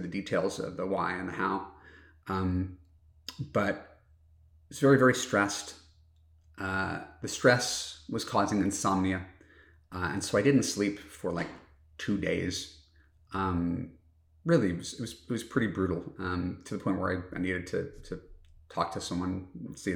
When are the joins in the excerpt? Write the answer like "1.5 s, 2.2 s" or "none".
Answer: none